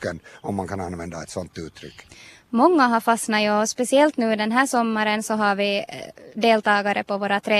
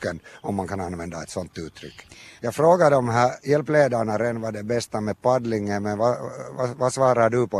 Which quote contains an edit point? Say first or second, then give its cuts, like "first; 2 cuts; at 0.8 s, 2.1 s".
second; 1 cut; at 2.4 s